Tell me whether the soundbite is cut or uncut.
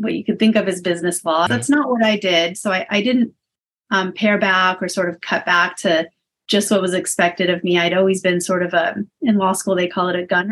cut